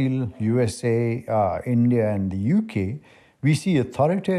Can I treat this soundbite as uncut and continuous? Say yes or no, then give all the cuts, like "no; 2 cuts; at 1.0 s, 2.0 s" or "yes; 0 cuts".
yes; 0 cuts